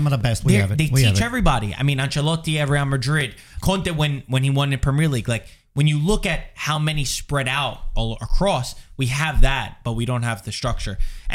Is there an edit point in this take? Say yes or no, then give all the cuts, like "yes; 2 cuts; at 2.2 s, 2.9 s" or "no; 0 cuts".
yes; 1 cut; at 3.6 s